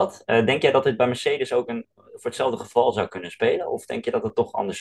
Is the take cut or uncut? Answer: uncut